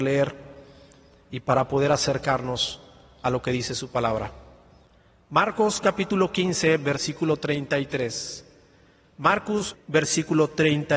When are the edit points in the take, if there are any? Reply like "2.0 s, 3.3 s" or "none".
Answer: 9.7 s